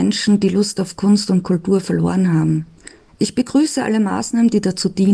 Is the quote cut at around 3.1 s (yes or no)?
yes